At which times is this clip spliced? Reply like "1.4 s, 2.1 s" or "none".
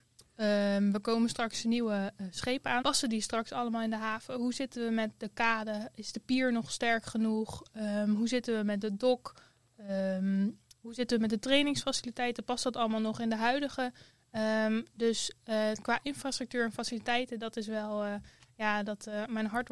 2.8 s